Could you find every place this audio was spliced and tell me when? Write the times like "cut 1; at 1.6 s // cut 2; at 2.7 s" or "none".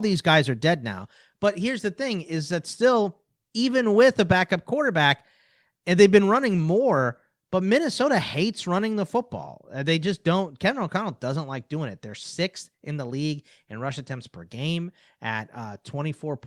none